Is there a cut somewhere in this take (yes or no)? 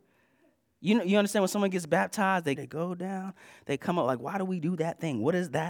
yes